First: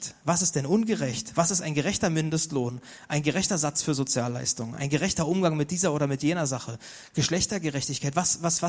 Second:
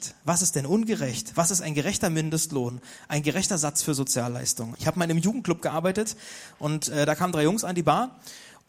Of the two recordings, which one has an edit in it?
second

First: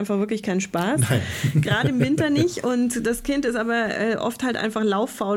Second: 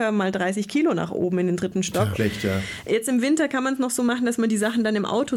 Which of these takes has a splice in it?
second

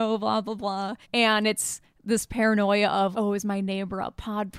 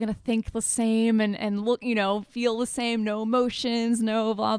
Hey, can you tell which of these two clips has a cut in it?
first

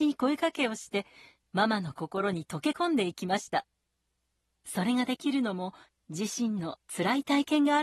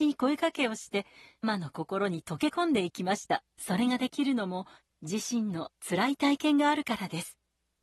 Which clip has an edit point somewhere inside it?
second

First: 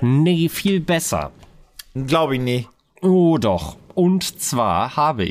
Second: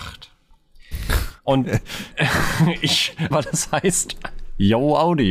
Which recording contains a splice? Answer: second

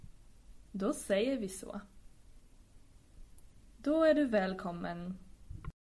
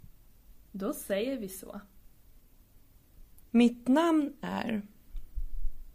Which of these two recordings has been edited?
second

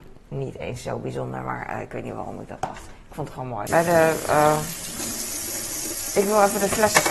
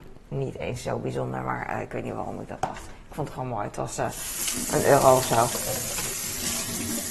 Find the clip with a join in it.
first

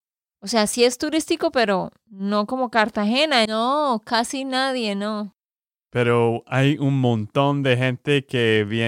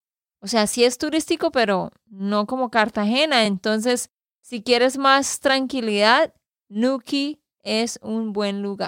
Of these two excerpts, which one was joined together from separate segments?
first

